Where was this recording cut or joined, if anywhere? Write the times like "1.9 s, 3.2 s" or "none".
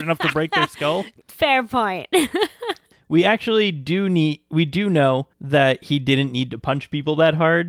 2.9 s, 5.3 s